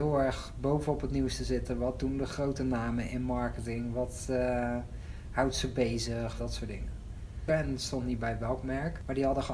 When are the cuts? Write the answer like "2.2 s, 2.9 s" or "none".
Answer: 6.4 s, 7.5 s